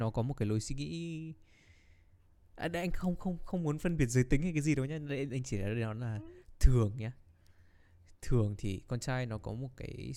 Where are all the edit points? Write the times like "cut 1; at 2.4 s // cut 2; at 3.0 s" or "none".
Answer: none